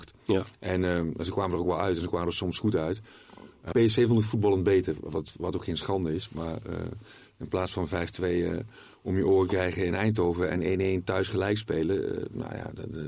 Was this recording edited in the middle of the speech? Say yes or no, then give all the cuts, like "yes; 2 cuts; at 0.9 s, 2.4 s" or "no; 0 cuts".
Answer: yes; 1 cut; at 3.7 s